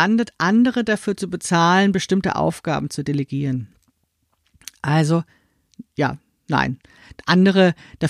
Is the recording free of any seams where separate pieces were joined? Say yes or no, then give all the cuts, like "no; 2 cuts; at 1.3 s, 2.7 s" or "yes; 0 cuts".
yes; 0 cuts